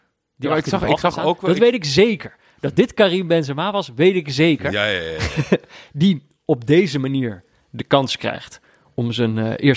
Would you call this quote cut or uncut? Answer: uncut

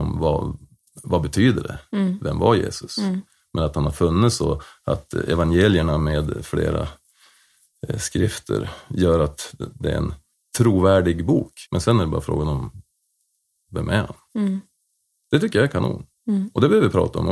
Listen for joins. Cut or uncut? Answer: cut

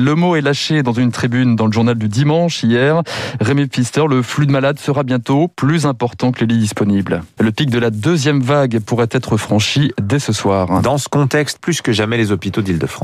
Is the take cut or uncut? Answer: cut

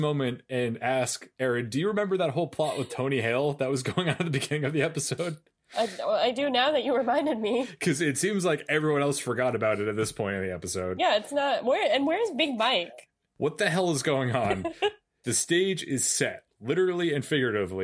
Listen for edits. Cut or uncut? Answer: uncut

